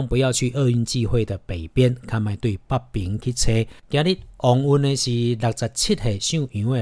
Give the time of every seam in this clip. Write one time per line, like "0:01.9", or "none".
0:03.8